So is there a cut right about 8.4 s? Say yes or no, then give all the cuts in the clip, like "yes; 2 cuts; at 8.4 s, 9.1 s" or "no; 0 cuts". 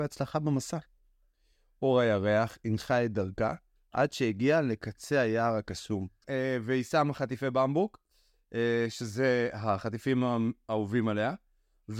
no; 1 cut; at 6.2 s